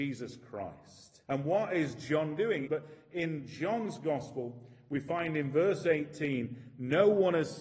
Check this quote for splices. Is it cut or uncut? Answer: cut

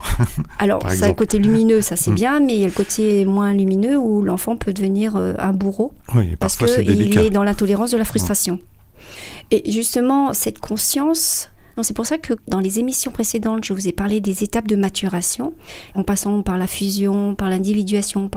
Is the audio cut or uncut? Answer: cut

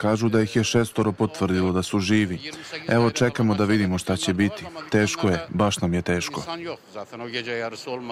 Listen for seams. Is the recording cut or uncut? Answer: uncut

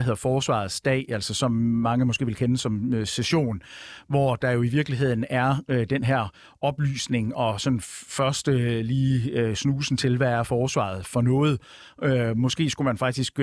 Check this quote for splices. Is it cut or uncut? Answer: uncut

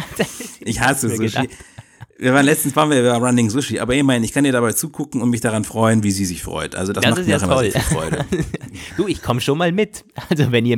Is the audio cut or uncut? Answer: uncut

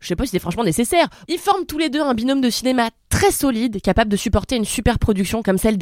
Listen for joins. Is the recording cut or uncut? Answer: cut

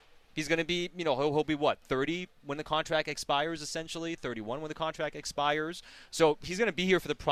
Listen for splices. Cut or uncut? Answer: uncut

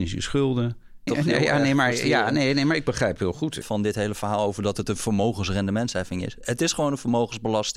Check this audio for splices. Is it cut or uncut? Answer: cut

